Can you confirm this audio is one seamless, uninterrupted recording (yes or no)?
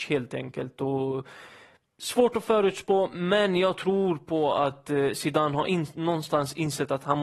yes